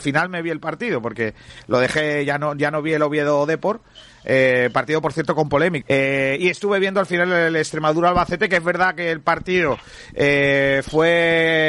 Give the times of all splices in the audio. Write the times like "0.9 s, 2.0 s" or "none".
5.8 s